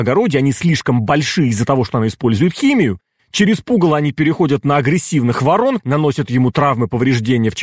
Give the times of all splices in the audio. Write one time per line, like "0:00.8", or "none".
0:03.2
0:05.8